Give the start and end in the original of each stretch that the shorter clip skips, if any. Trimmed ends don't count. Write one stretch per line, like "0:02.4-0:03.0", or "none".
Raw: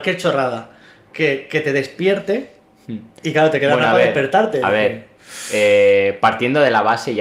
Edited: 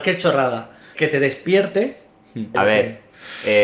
0:01.0-0:01.5
0:03.1-0:04.6